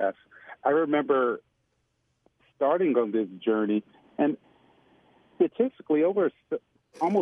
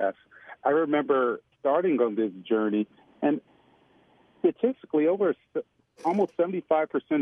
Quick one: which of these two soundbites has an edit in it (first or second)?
second